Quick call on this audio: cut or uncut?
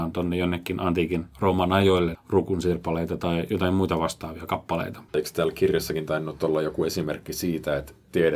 cut